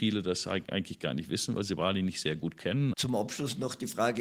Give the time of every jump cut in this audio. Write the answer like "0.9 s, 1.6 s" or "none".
2.9 s